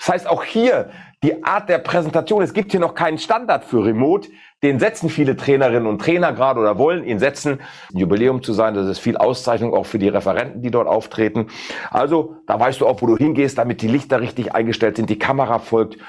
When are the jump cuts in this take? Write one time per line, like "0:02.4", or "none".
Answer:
0:07.9